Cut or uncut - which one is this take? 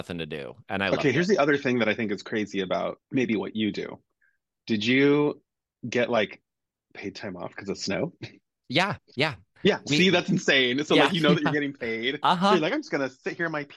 cut